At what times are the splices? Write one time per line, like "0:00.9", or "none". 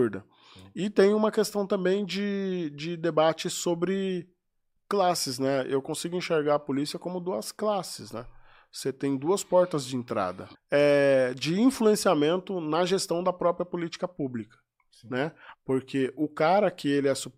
0:10.5
0:15.5

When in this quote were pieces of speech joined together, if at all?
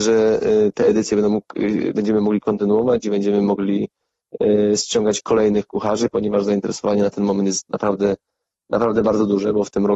none

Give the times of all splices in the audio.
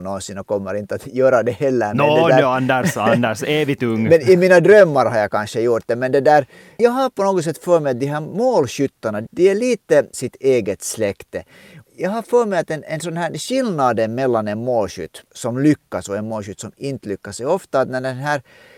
0:10.1
0:15.3

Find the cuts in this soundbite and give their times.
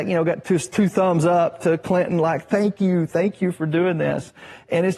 none

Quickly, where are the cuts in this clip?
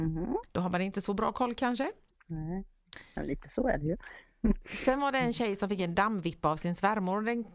0:02.1

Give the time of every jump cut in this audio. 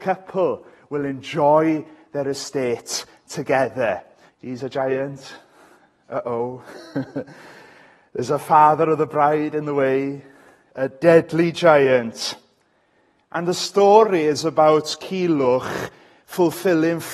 0:04.3

